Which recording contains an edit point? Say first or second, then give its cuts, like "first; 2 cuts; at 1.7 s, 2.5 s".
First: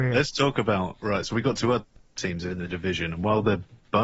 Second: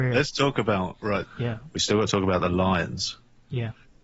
second; 1 cut; at 1.2 s